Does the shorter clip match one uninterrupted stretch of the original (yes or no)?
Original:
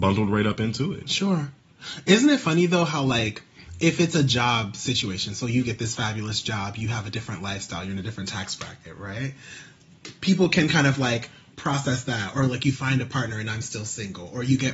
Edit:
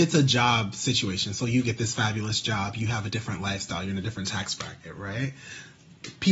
yes